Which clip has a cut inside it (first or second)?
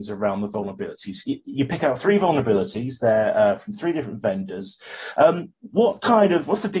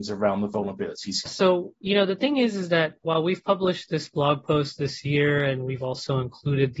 second